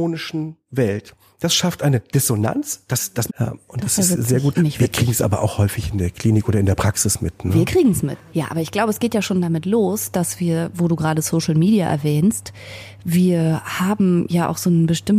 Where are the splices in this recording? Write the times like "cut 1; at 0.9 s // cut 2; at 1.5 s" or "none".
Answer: cut 1; at 3.3 s // cut 2; at 4.5 s